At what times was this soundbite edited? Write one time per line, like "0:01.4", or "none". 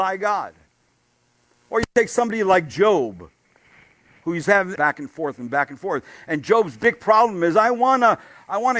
0:04.8